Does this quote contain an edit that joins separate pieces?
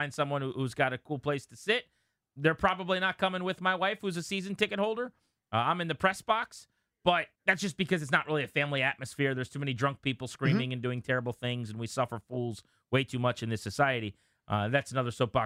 yes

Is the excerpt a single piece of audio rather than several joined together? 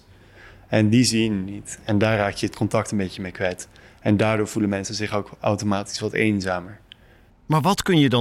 yes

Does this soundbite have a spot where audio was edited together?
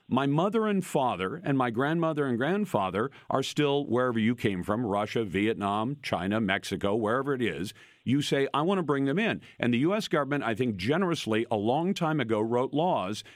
no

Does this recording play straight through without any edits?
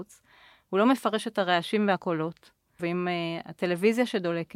no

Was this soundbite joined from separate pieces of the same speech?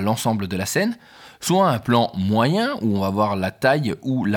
no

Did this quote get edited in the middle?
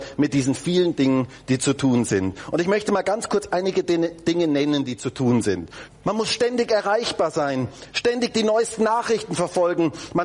yes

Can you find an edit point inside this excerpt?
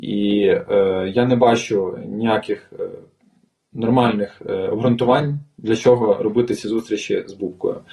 no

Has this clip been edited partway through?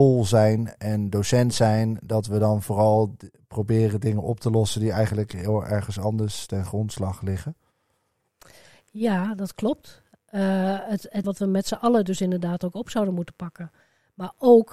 yes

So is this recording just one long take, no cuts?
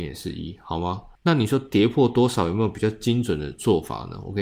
no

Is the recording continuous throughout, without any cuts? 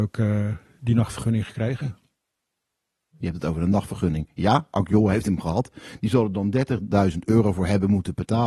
yes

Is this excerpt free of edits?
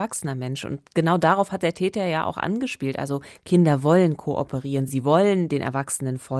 yes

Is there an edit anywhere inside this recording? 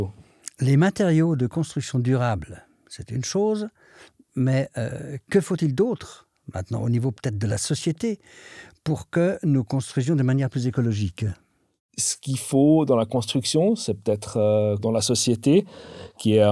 yes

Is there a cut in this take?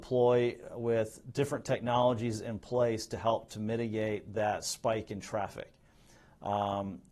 no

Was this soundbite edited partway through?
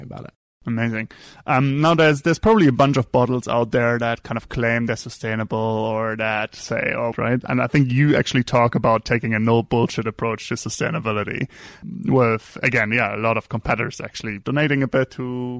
yes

